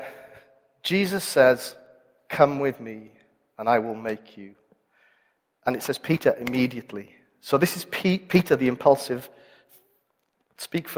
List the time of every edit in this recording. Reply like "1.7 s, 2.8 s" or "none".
none